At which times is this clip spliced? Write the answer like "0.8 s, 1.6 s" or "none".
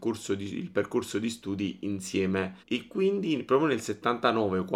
2.6 s